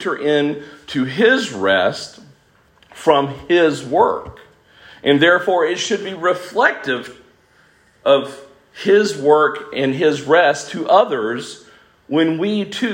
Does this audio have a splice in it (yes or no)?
no